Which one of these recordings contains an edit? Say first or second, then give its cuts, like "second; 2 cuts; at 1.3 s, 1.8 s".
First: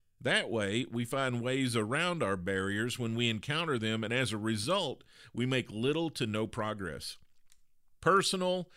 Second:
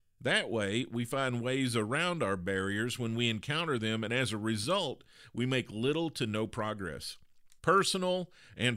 second; 1 cut; at 7.6 s